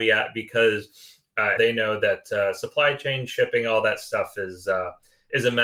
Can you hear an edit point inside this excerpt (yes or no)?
yes